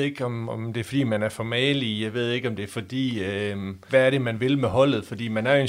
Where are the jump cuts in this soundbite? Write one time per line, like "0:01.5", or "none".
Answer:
0:03.9